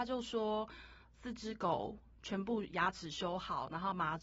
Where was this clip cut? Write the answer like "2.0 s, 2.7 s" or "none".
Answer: 1.0 s